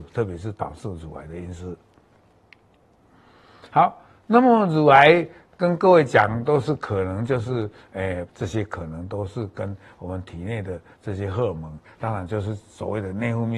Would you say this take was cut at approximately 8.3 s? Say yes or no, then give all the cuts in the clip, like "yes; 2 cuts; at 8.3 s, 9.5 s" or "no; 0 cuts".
yes; 2 cuts; at 8.3 s, 11.8 s